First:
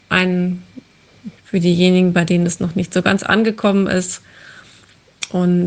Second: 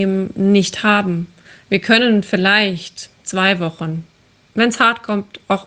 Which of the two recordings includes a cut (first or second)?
first